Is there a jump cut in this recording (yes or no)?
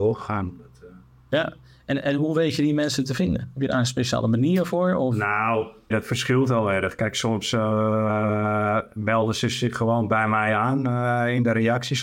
yes